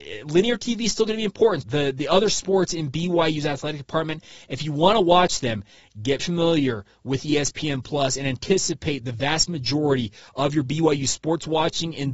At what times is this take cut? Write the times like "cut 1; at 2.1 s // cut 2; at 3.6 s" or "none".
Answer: cut 1; at 1.6 s // cut 2; at 6.2 s